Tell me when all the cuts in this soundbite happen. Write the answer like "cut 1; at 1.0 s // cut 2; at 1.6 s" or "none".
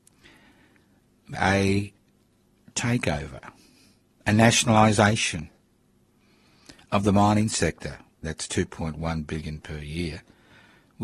cut 1; at 1.3 s // cut 2; at 8.2 s